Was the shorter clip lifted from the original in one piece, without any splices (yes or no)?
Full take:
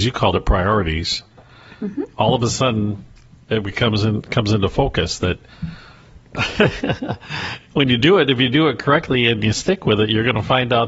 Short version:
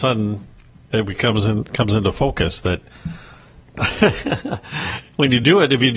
yes